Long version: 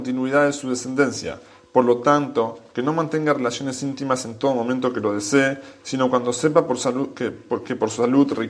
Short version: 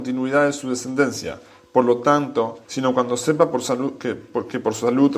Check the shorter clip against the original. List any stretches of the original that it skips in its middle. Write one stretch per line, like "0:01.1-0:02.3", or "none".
0:02.6-0:05.8